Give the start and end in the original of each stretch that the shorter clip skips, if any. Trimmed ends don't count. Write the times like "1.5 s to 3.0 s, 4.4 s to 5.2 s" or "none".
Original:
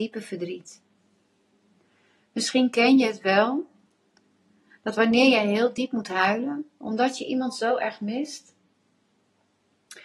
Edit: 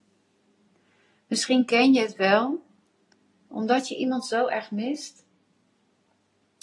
4.5 s to 6.8 s